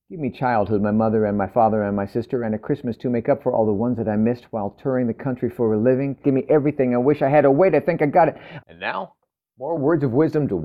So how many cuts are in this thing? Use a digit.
2